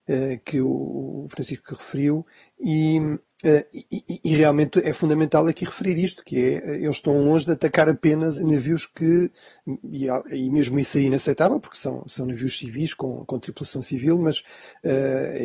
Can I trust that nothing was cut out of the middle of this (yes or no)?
no